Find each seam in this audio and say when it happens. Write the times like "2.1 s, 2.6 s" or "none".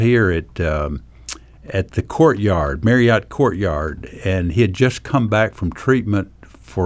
none